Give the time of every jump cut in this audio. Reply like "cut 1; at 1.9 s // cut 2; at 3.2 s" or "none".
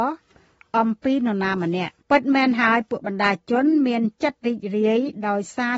cut 1; at 2.0 s